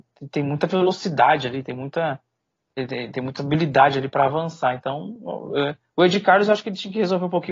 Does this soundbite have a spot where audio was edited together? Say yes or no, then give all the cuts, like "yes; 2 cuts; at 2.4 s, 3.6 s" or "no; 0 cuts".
no; 0 cuts